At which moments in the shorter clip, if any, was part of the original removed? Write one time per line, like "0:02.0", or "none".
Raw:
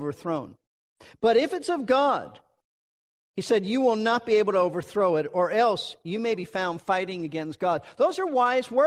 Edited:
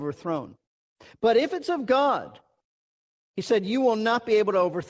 none